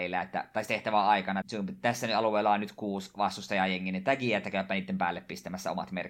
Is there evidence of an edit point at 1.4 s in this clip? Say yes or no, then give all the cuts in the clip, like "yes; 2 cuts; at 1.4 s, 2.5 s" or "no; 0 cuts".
yes; 1 cut; at 1.4 s